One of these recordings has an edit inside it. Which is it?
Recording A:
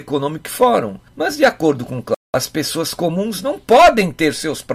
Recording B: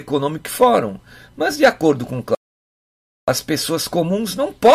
A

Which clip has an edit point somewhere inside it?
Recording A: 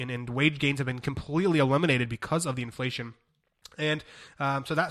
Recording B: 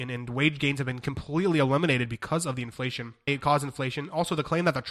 B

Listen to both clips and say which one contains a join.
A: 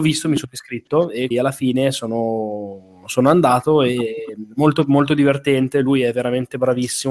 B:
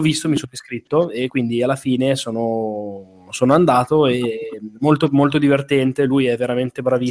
A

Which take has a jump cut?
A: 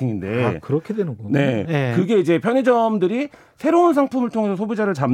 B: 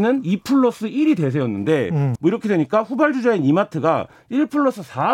B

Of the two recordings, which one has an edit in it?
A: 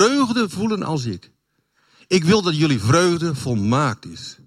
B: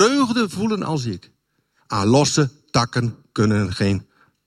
B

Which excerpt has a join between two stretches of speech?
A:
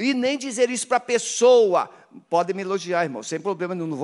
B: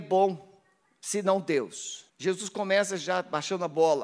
B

